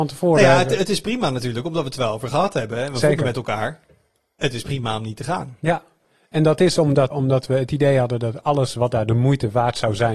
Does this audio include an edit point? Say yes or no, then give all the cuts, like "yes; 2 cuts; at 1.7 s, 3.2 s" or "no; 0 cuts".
yes; 1 cut; at 7.1 s